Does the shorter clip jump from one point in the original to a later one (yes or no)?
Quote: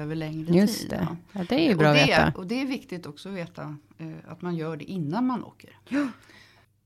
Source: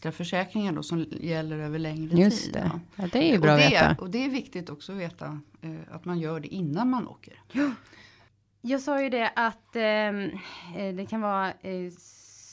no